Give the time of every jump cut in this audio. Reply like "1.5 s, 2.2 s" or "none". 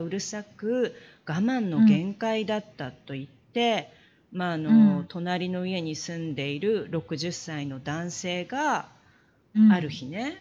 none